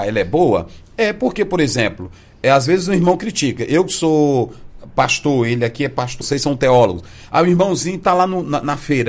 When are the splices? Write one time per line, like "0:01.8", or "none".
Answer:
0:06.2

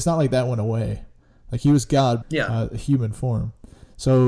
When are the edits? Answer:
0:02.2

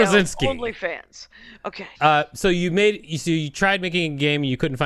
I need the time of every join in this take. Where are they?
0:01.9

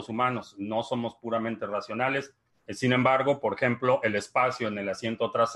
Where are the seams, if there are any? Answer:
0:02.5

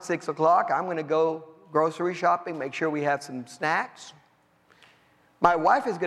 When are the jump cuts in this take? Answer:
none

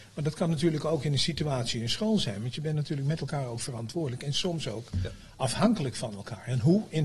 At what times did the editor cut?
none

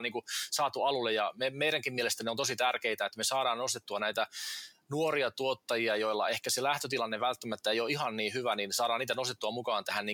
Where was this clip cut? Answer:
none

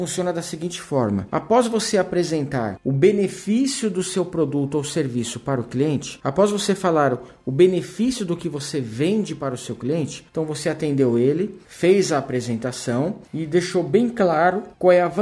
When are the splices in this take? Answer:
none

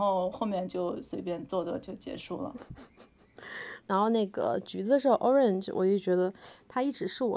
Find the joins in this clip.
none

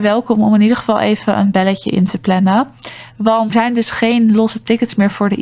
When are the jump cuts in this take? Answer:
0:03.5

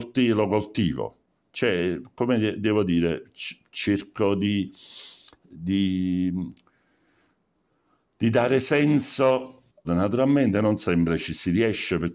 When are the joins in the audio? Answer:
0:09.8

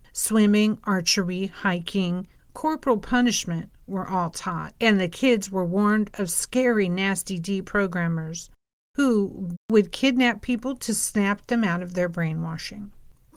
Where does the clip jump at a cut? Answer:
0:02.4
0:09.5

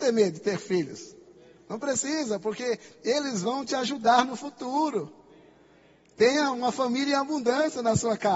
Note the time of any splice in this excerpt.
none

